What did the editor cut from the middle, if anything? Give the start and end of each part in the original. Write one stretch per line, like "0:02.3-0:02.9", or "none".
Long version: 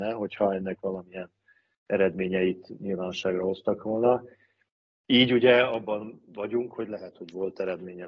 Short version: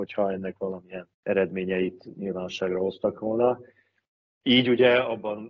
0:01.4-0:01.8